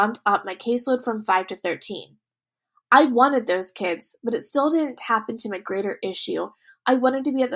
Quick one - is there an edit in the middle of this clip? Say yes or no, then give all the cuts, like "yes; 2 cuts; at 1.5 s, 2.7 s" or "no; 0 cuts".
no; 0 cuts